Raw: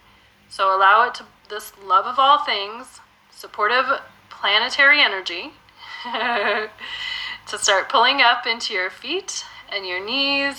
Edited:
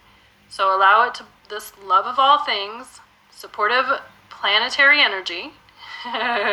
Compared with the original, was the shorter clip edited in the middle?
no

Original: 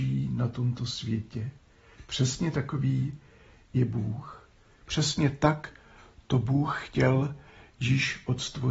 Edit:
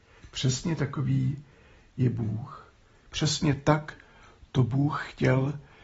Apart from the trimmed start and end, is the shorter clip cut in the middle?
no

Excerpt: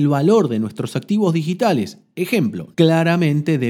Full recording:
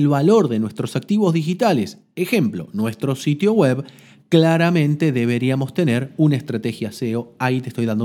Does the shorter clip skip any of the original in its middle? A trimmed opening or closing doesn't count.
yes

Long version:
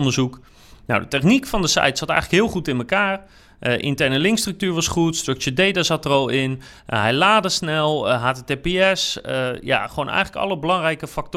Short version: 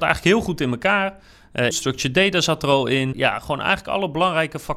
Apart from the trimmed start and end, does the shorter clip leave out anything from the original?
yes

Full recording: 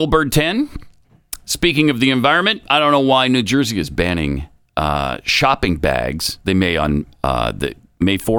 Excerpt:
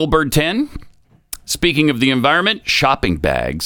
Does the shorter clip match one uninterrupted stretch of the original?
no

